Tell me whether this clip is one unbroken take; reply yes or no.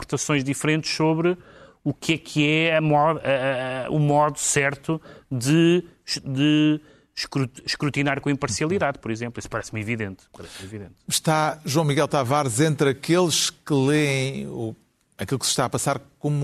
yes